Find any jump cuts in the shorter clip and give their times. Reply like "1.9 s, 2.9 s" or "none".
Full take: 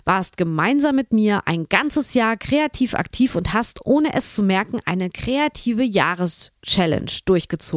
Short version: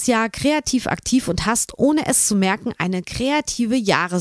none